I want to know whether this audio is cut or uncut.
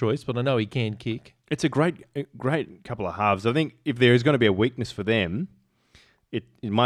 uncut